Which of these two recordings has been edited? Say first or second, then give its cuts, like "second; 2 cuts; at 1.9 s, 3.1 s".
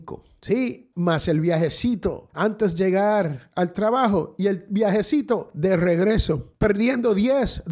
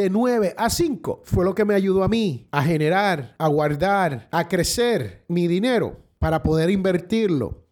first; 1 cut; at 0.9 s